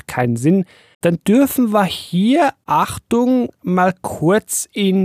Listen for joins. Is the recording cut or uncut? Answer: cut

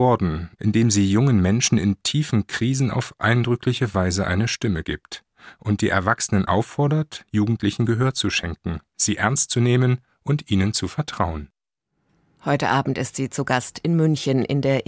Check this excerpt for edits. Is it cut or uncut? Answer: uncut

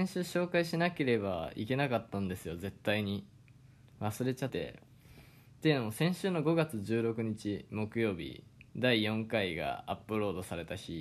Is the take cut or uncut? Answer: cut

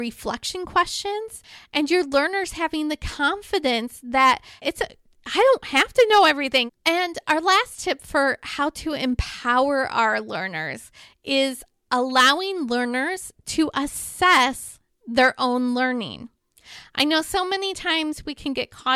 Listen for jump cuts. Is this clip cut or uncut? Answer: cut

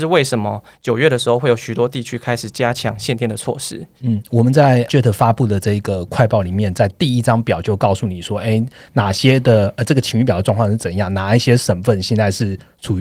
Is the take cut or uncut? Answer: uncut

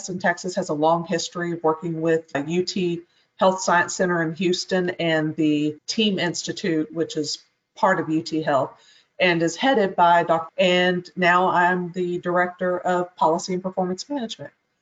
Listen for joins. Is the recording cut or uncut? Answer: cut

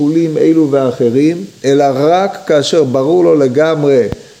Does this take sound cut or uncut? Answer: cut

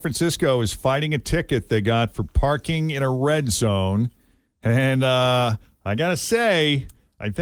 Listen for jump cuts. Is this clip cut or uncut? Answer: uncut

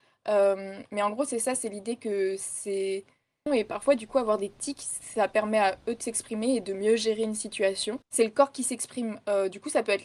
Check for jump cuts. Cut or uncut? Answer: cut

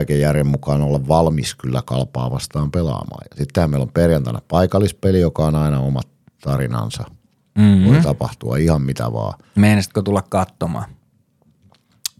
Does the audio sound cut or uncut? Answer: uncut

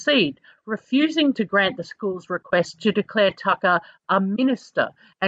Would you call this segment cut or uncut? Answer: uncut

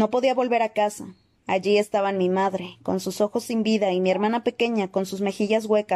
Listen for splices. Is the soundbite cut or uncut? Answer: uncut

